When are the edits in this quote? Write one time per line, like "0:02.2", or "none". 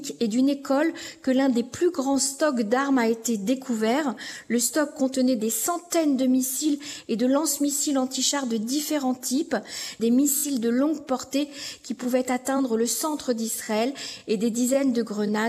0:10.0